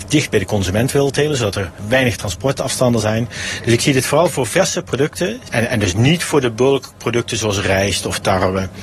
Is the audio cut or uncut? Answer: uncut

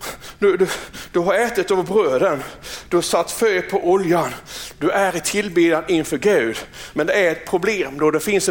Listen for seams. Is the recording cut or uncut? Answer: uncut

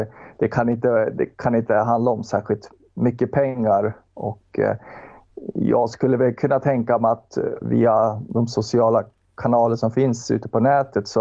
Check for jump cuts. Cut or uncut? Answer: cut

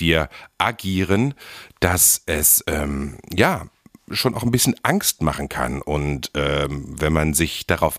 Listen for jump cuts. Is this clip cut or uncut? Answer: uncut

